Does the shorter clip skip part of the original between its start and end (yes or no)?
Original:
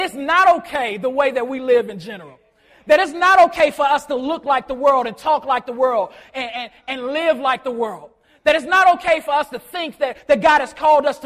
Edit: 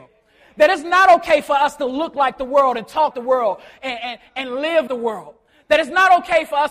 yes